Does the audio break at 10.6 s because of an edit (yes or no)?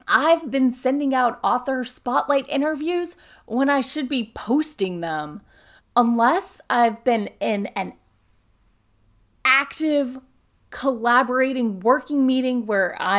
no